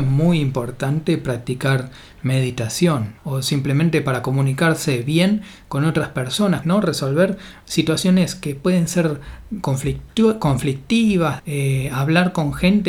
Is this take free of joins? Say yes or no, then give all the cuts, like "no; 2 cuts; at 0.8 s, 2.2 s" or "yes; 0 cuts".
no; 3 cuts; at 3.2 s, 6.6 s, 11.4 s